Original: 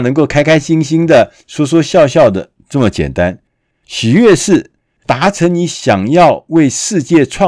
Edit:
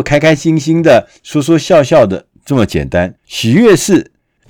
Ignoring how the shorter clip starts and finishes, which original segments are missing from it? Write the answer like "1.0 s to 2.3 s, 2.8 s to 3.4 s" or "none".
3.4 s to 3.8 s